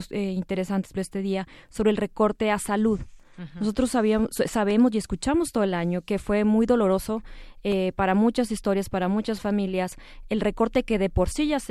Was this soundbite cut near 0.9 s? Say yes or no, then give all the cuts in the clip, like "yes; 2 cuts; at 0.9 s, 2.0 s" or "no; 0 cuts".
yes; 1 cut; at 0.9 s